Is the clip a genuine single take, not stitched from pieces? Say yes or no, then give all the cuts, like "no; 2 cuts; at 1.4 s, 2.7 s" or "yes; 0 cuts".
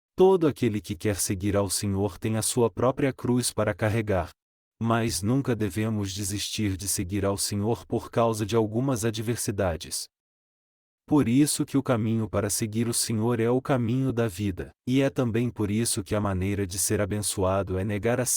no; 2 cuts; at 4.6 s, 14.8 s